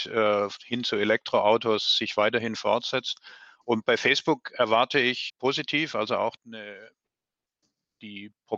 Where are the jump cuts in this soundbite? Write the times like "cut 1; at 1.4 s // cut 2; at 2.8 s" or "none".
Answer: cut 1; at 5.3 s // cut 2; at 6.4 s